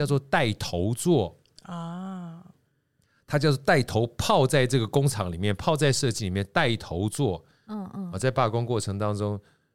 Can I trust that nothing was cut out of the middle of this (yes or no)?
no